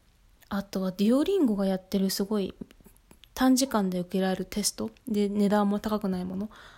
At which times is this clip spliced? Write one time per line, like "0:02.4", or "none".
none